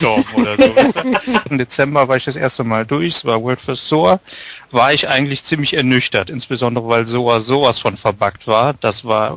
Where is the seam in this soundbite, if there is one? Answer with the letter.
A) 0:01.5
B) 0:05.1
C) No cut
A